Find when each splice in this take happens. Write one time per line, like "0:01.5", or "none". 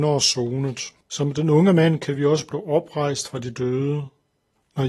0:01.0